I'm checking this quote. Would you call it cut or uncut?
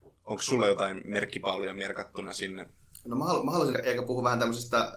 cut